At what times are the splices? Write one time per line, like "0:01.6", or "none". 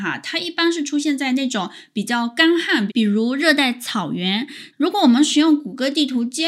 0:02.9
0:04.7